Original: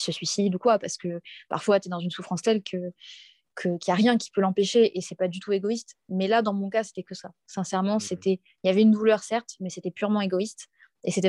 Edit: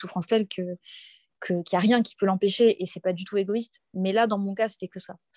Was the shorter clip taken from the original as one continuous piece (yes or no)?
yes